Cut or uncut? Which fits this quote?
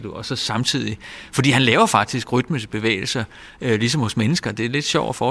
uncut